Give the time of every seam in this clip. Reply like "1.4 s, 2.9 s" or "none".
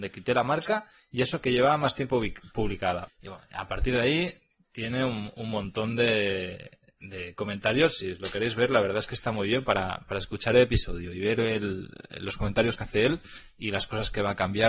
3.1 s